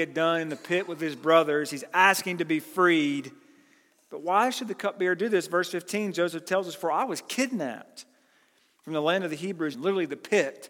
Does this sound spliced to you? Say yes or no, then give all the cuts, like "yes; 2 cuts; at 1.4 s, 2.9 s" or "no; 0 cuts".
yes; 1 cut; at 9.7 s